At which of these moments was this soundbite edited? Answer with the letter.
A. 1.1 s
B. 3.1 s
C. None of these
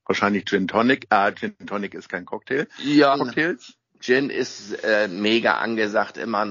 B